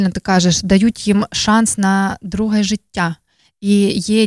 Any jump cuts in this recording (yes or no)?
no